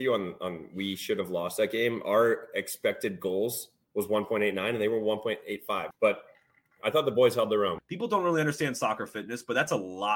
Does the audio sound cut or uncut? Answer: cut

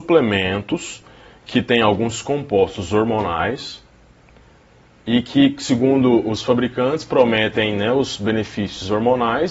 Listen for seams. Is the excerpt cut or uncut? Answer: uncut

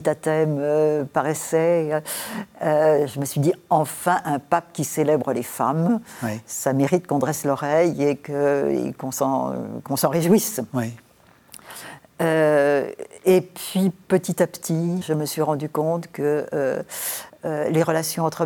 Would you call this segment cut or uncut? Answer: cut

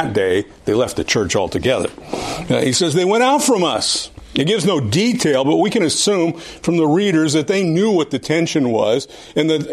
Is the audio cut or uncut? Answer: uncut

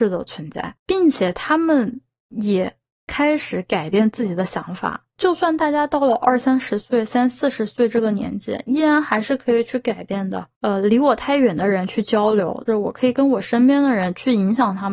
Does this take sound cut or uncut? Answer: cut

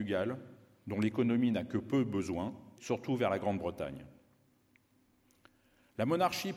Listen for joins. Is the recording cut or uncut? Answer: cut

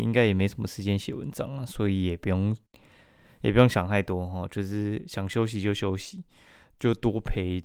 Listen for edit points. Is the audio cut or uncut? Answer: uncut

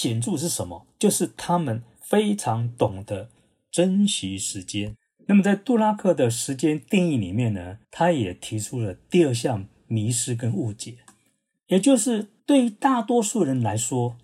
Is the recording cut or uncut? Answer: cut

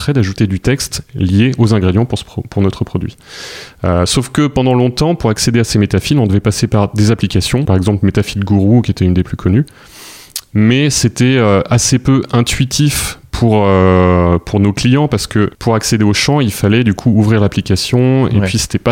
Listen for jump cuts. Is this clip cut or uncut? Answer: cut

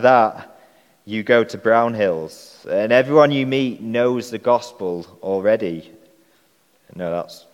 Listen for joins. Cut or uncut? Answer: uncut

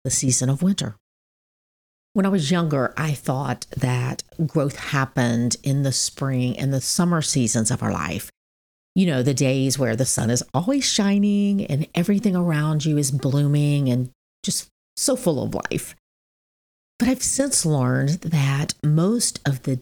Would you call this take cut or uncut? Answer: uncut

